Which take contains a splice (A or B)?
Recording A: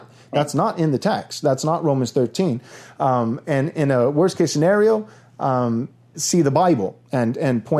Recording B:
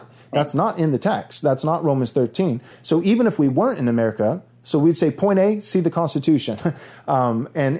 A